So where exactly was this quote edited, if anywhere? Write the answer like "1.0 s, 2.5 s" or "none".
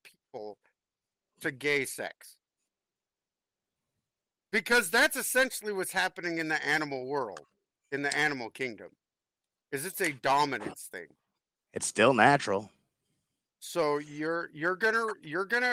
11.6 s

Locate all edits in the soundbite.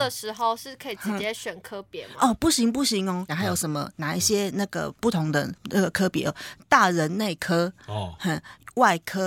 3.3 s

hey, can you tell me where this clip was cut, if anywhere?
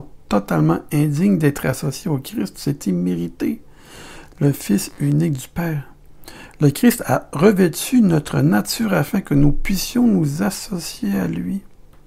none

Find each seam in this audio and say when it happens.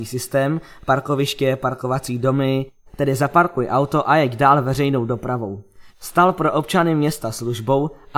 2.9 s, 5.9 s

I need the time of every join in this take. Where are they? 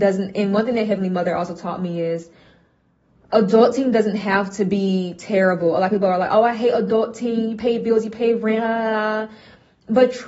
none

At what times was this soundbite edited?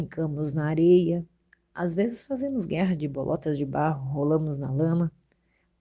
none

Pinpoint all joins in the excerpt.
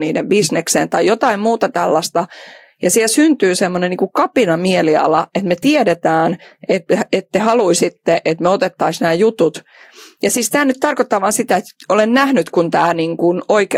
none

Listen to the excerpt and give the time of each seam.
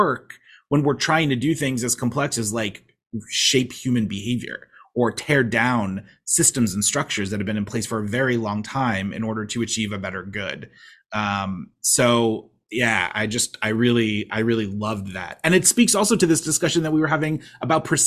none

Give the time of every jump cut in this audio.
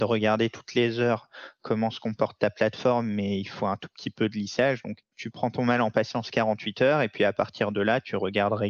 none

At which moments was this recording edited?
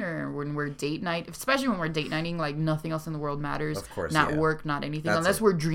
none

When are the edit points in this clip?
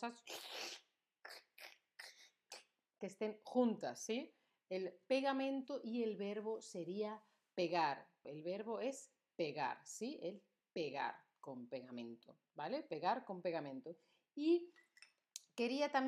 8.2 s

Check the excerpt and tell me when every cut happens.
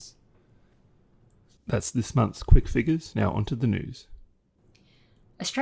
none

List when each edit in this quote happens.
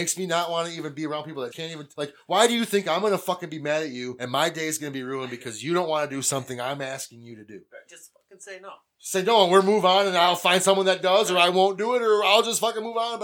1.5 s

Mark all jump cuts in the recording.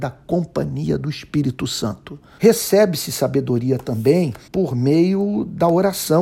2.4 s, 4.5 s

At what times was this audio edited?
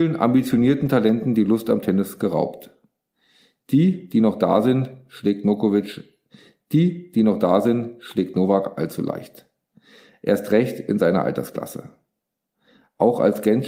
none

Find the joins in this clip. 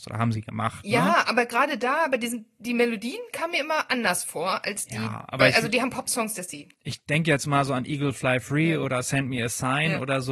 none

